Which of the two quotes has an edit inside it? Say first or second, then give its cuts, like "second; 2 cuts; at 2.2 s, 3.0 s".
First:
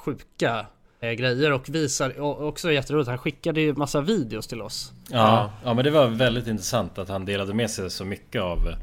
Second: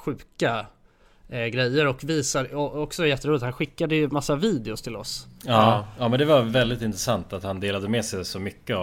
first; 1 cut; at 1.0 s